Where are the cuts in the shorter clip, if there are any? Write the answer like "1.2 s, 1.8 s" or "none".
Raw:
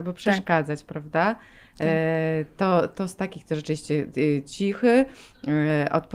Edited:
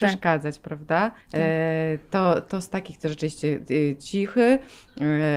1.2 s